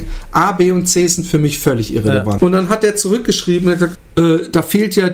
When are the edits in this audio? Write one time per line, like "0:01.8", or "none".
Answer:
0:02.4
0:03.9